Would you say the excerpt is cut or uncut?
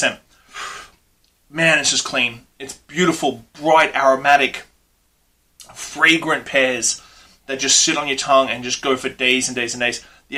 uncut